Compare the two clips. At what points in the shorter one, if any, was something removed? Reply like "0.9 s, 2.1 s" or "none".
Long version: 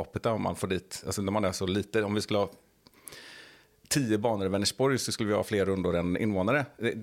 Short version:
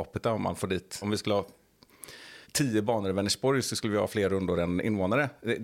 1.0 s, 2.4 s